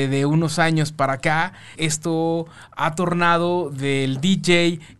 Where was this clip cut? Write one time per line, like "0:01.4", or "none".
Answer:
0:01.8